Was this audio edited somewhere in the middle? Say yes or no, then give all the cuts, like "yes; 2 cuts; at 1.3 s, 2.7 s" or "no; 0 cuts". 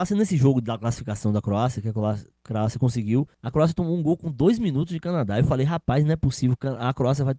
yes; 1 cut; at 3.3 s